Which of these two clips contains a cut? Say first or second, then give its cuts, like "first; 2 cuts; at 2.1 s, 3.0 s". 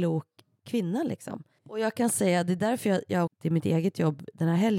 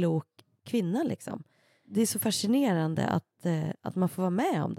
first; 2 cuts; at 1.6 s, 3.3 s